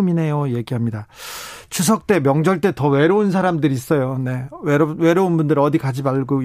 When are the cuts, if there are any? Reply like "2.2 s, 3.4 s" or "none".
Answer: none

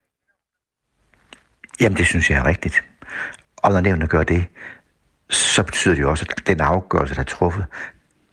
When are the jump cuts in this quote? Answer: 3.4 s

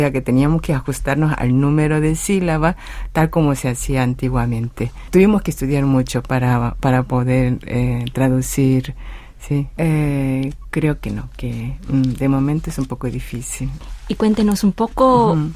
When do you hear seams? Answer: 9.8 s

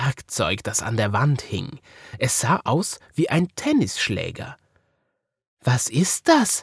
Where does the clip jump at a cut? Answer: none

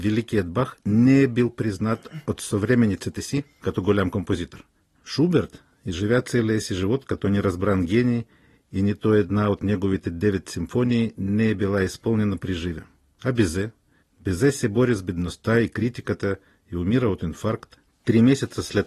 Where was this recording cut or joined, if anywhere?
none

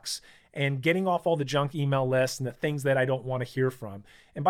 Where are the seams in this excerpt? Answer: none

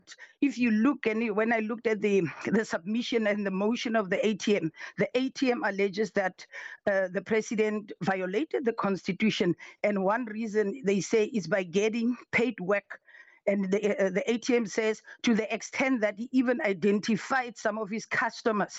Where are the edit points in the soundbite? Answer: none

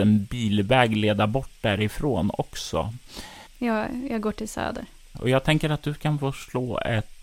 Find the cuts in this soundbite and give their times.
3.5 s

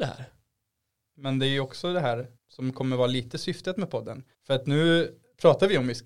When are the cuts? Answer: 1.1 s, 2.4 s, 4.3 s

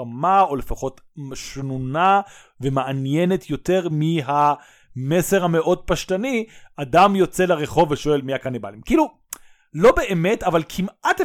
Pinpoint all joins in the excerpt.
none

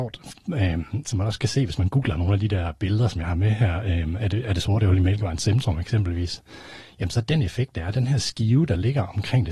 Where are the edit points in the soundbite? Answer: 1.0 s

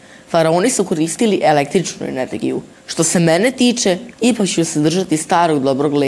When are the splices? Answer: 2.7 s, 4.1 s

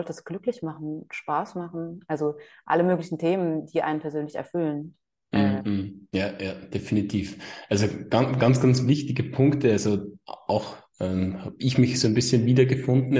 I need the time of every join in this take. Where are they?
6.1 s

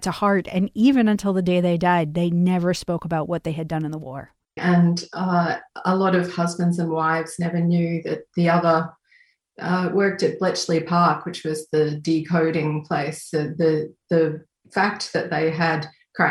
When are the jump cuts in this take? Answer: 4.6 s

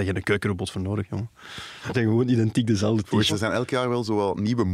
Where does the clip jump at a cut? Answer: 1.9 s, 3.3 s

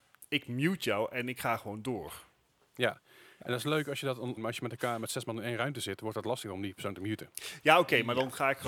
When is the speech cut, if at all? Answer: 4.4 s

